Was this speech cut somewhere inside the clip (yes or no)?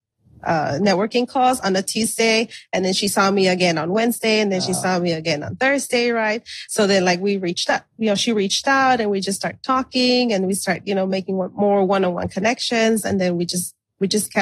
no